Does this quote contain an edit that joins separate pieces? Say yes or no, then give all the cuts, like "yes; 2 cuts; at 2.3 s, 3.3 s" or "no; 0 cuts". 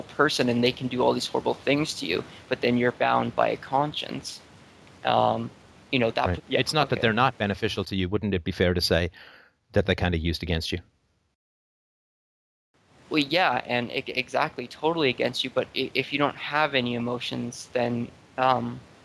yes; 1 cut; at 6.4 s